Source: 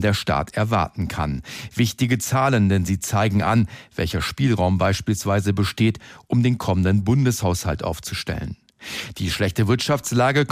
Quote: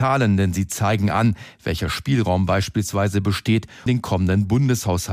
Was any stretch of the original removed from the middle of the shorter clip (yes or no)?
yes